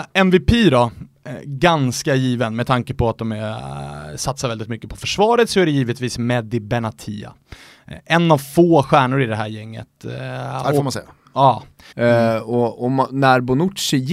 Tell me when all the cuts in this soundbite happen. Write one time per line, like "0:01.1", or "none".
0:11.9

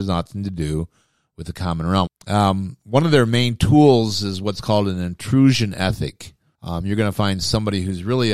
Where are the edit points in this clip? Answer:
0:02.1
0:06.5

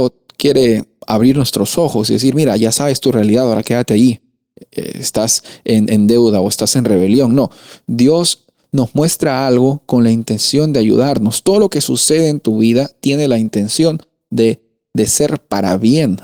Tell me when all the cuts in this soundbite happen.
none

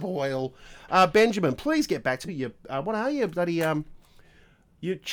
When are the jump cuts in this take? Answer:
0:02.3

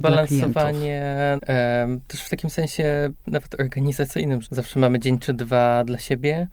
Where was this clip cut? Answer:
0:01.4
0:04.4

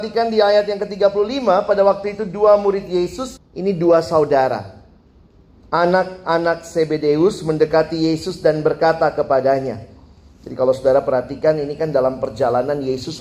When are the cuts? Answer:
0:03.4

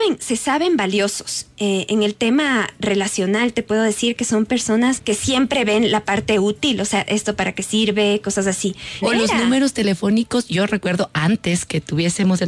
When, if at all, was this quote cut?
0:09.0

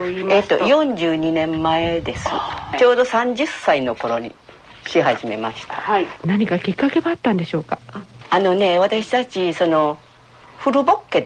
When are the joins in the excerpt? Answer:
none

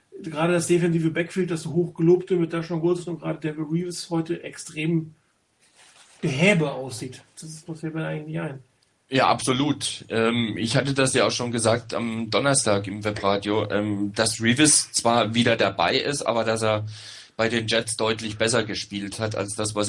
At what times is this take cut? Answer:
0:07.7

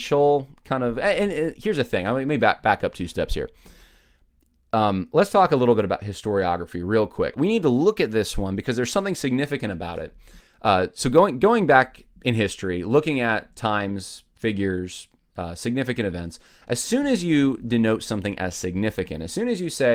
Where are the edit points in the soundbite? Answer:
0:07.3
0:10.4

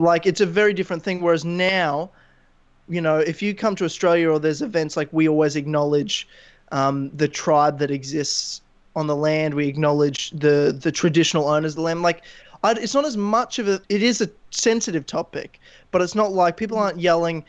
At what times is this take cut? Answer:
0:13.8

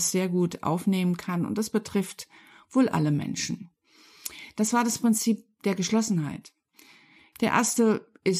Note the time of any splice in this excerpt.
0:07.3

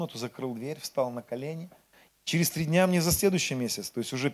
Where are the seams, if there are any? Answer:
0:02.1

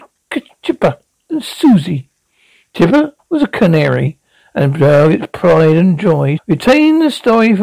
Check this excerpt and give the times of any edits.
0:03.2
0:06.4

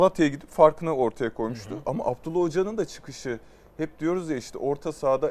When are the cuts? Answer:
none

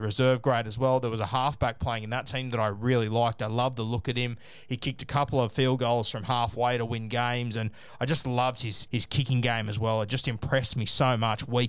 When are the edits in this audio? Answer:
0:08.9

